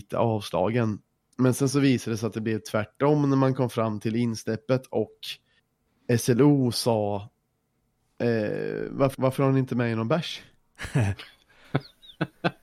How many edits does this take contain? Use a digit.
1